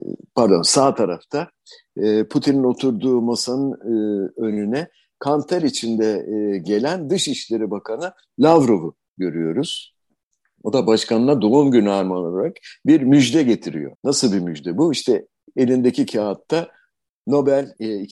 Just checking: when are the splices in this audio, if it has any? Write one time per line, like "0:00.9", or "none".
0:13.9

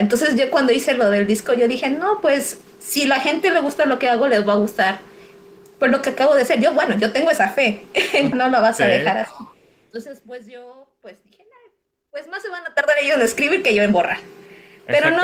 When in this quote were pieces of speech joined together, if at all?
0:08.3

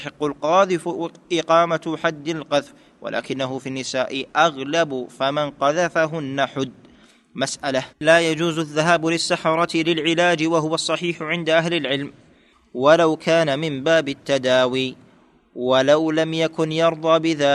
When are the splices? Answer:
0:07.9

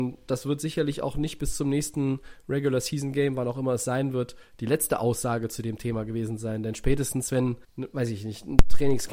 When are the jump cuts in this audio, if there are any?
0:07.6

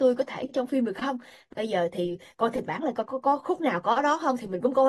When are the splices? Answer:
0:03.0

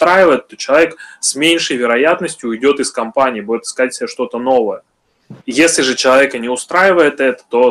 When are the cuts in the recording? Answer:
0:05.4

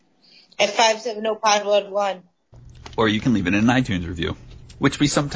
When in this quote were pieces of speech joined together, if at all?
none

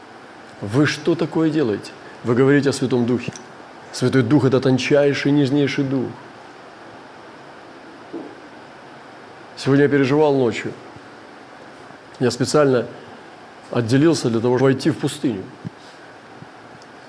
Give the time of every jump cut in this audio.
0:14.6

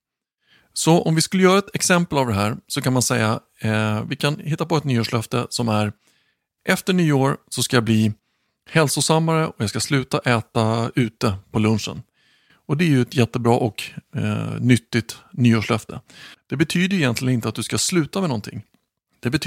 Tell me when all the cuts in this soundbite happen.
0:16.3

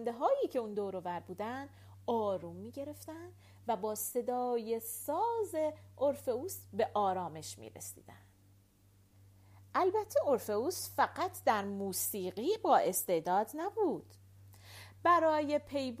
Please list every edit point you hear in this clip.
none

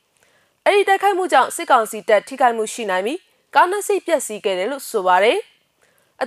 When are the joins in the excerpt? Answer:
none

